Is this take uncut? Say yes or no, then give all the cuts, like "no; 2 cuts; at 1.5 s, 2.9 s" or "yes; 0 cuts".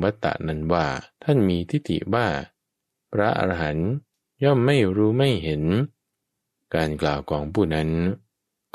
no; 1 cut; at 1.1 s